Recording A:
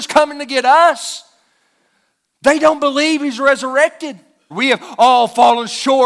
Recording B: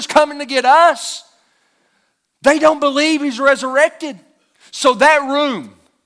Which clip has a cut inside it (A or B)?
A